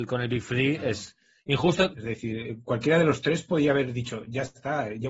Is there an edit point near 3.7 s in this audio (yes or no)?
no